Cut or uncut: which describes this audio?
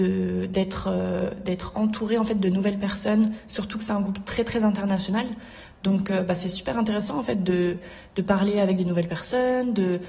uncut